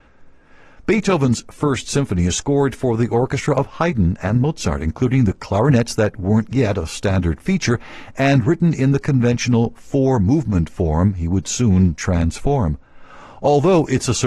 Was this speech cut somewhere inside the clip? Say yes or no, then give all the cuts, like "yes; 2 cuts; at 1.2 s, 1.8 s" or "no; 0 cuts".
no; 0 cuts